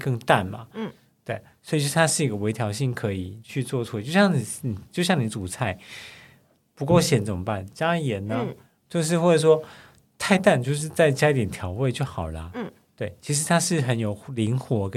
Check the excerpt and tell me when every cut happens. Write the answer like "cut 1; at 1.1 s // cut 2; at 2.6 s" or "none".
none